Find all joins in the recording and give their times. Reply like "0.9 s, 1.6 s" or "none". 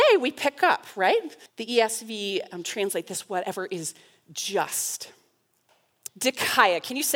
1.5 s, 6.1 s